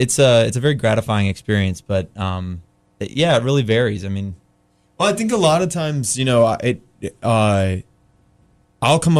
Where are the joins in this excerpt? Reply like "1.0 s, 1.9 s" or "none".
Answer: none